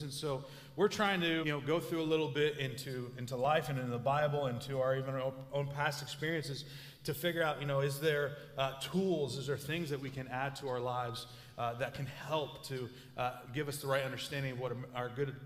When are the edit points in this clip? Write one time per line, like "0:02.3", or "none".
0:01.4

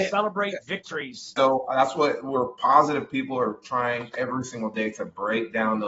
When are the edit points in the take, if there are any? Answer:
0:01.4

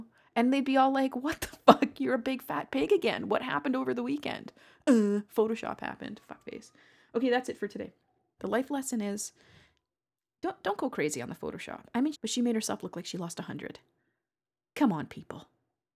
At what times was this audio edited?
0:08.4
0:12.1

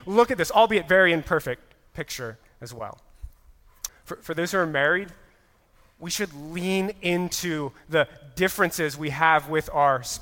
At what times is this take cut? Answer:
0:03.9

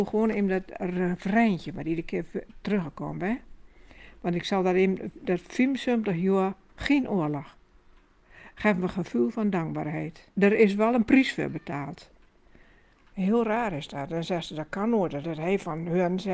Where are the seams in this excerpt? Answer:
0:10.3
0:13.1
0:15.2

